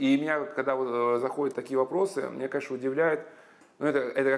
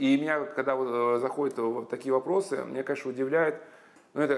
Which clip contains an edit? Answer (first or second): first